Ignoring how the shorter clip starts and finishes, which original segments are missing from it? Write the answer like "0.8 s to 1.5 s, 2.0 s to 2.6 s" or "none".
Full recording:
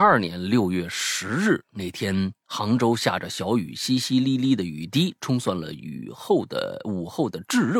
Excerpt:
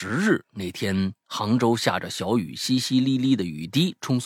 none